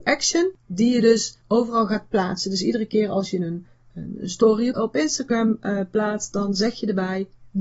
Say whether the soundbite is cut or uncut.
cut